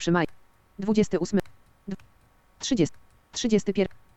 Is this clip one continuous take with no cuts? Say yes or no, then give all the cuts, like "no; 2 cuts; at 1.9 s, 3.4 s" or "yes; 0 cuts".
yes; 0 cuts